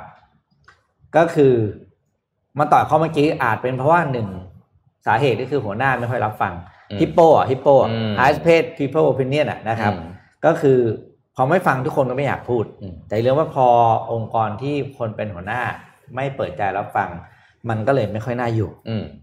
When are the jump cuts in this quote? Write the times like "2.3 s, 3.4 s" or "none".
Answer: none